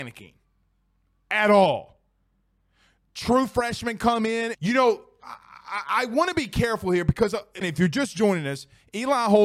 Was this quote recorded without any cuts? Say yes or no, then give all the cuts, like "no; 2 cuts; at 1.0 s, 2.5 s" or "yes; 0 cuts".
no; 2 cuts; at 4.5 s, 7.6 s